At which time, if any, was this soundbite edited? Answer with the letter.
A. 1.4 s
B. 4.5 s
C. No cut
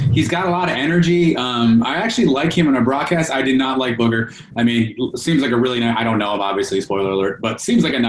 C